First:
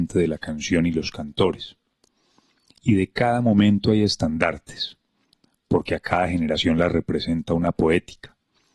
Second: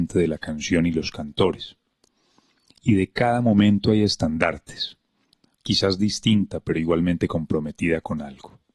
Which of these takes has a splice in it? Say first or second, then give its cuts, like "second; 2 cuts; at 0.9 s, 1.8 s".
second; 1 cut; at 5.6 s